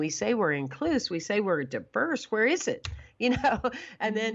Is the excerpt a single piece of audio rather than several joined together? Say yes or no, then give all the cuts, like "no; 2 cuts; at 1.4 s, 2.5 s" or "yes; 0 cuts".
yes; 0 cuts